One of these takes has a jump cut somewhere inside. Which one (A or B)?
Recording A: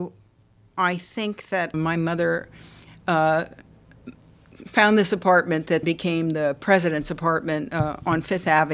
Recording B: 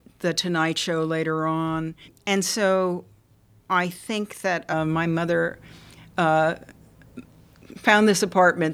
A